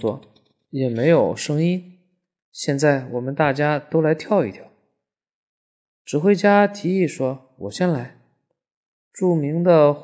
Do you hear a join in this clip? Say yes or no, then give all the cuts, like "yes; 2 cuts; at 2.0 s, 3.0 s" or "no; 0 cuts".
no; 0 cuts